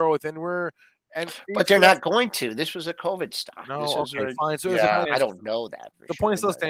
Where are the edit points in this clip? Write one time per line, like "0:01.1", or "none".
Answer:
0:05.0